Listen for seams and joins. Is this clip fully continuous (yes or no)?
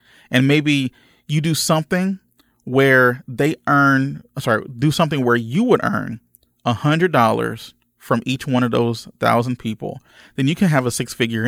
yes